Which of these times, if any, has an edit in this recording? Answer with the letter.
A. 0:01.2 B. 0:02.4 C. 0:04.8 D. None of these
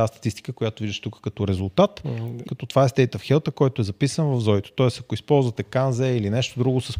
B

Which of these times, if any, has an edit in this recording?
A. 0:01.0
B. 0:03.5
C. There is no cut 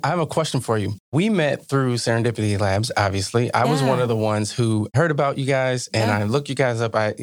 A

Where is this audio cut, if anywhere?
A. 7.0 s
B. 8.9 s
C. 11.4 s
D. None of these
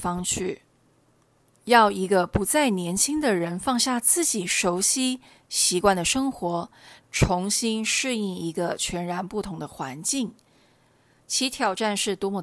A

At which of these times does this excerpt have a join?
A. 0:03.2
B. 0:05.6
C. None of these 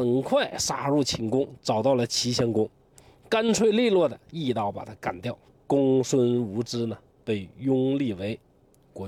B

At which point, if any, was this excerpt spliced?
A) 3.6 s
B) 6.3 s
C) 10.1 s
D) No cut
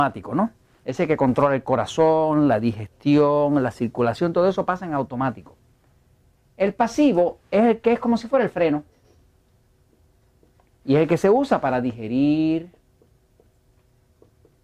D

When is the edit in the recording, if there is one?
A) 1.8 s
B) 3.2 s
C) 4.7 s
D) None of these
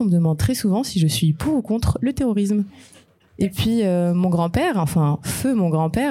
D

